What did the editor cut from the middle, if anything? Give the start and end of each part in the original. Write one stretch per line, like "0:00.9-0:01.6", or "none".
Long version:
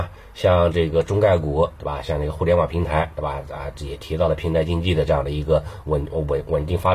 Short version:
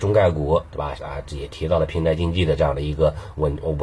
0:02.0-0:03.4